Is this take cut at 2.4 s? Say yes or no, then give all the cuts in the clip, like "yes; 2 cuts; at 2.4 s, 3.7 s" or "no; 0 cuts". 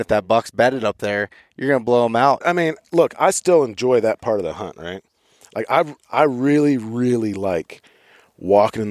yes; 1 cut; at 2.4 s